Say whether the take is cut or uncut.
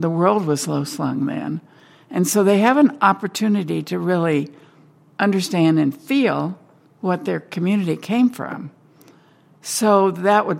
uncut